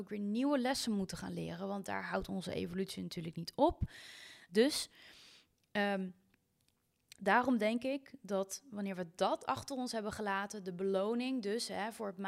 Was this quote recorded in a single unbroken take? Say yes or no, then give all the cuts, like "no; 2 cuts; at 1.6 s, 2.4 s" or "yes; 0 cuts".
no; 1 cut; at 4.5 s